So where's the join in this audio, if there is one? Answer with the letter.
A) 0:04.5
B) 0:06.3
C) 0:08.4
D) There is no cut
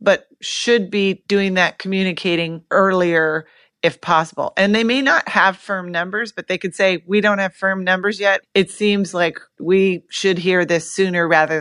C